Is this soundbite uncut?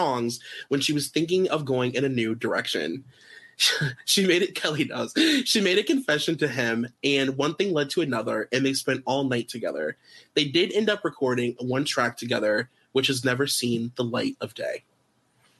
yes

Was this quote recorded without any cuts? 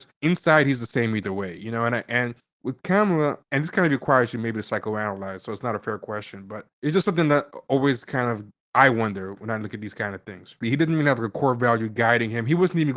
no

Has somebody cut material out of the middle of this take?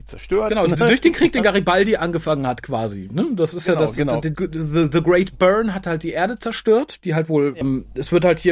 yes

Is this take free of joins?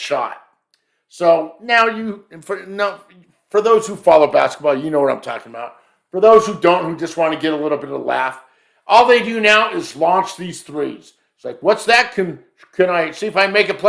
yes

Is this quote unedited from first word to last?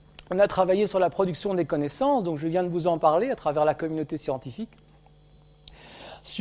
yes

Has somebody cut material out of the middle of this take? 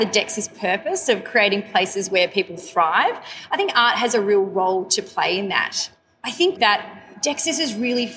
yes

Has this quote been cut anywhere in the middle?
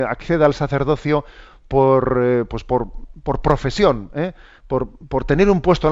yes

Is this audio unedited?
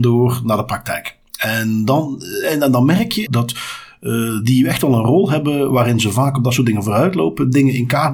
no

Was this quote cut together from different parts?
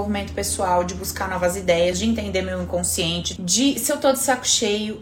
yes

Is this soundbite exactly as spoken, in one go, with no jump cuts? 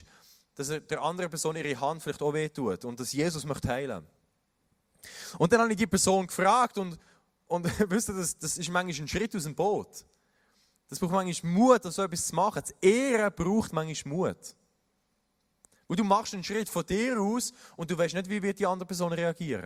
yes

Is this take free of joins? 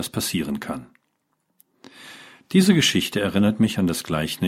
yes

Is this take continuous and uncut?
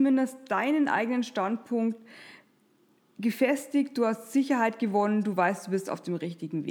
yes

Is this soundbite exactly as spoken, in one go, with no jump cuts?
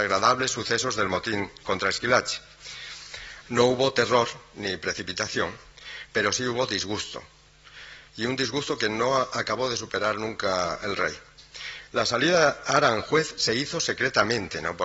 no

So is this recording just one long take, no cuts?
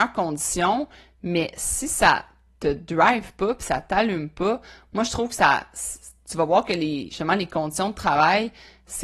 yes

